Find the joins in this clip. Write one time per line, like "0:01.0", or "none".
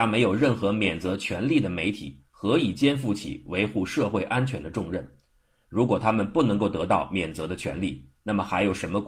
none